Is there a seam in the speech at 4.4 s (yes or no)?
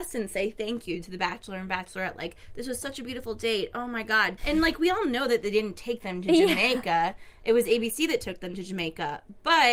yes